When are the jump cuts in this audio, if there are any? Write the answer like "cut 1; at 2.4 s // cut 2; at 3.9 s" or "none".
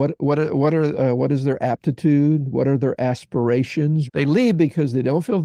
cut 1; at 4.1 s

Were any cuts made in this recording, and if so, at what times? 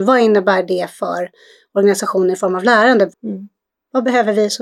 cut 1; at 3.1 s

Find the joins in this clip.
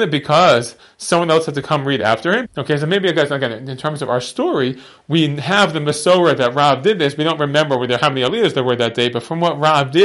cut 1; at 2.4 s

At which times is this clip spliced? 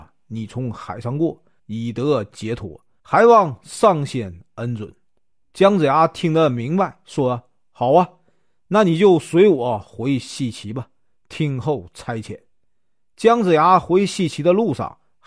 cut 1; at 1.6 s // cut 2; at 3.0 s

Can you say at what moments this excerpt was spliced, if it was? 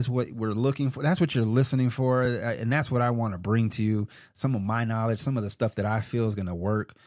none

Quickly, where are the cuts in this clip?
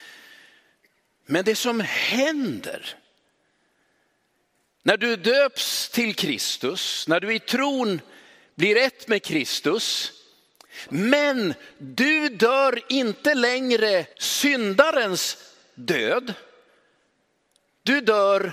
cut 1; at 10.9 s // cut 2; at 14.1 s

